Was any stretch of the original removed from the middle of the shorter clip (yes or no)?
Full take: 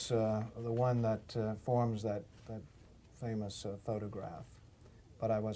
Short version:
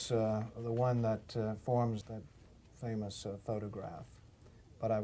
yes